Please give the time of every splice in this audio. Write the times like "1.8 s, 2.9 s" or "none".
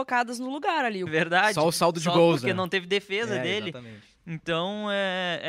1.1 s